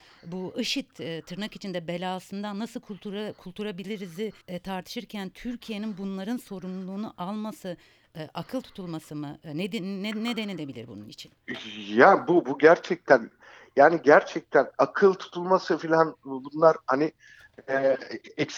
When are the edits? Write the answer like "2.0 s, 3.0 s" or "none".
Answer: 4.4 s